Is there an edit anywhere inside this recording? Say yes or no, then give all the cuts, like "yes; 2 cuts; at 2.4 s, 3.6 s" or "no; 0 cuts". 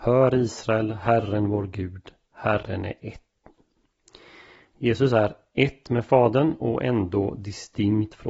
no; 0 cuts